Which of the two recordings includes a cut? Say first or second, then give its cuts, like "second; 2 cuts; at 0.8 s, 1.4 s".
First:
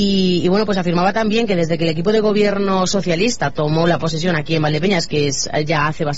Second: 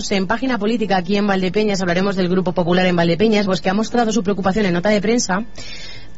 second; 1 cut; at 3.5 s